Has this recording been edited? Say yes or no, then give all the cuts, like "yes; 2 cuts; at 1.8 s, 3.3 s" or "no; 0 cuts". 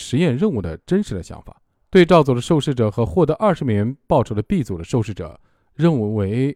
yes; 1 cut; at 1.7 s